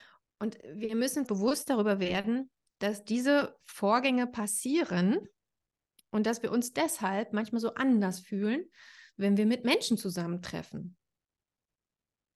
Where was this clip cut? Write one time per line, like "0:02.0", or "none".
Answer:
0:01.3

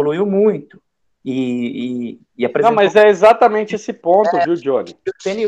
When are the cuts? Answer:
none

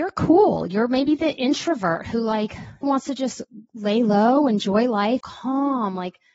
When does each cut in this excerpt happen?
0:02.8
0:05.2

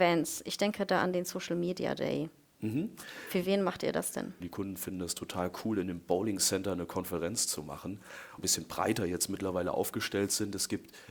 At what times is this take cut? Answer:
0:04.4
0:08.4

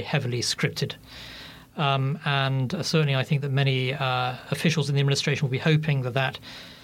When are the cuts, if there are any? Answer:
none

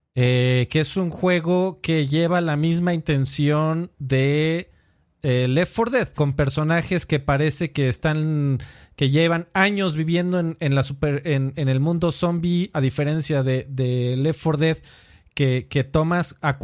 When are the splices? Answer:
0:06.2

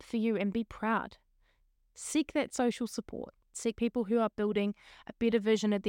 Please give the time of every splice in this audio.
0:03.5

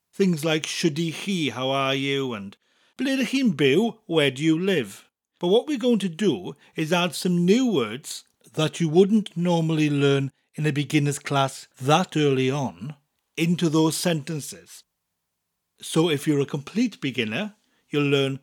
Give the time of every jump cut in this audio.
none

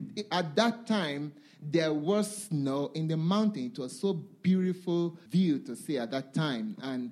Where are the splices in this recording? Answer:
0:05.3

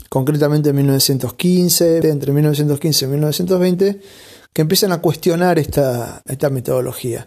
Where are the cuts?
0:02.0
0:06.3

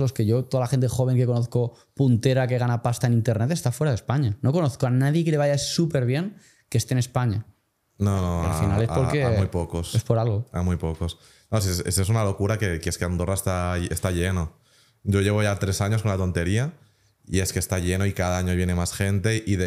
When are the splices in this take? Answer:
none

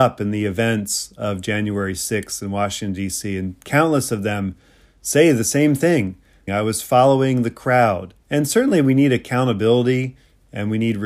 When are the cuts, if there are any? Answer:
0:06.5
0:08.2

